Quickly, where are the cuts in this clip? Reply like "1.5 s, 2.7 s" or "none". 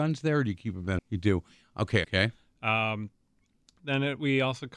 1.0 s, 2.0 s

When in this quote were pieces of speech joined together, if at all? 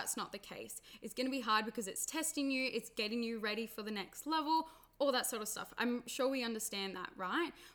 none

